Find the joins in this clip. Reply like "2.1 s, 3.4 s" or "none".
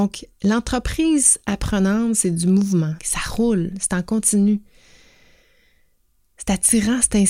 3.0 s